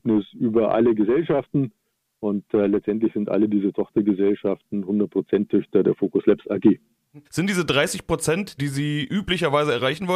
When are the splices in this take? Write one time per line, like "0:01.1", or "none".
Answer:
0:07.2
0:08.6